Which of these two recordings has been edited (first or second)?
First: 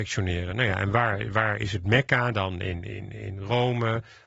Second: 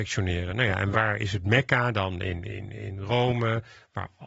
second